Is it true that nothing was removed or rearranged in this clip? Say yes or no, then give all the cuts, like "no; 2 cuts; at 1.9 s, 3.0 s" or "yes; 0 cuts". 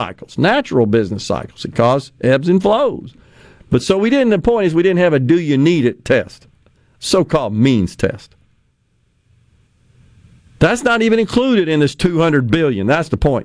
yes; 0 cuts